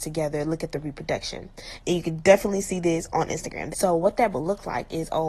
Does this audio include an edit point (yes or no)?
yes